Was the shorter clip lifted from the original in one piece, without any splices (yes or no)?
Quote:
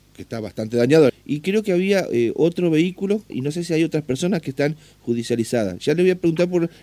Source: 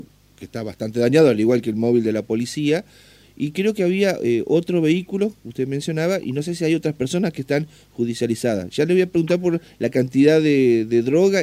no